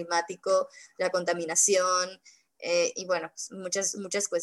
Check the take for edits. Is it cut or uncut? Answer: uncut